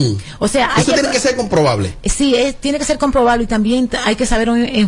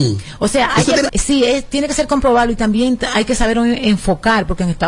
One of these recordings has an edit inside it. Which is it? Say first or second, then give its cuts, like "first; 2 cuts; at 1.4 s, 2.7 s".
second; 1 cut; at 1.1 s